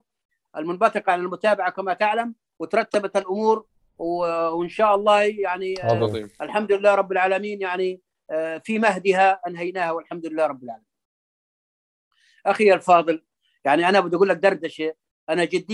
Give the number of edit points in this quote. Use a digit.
0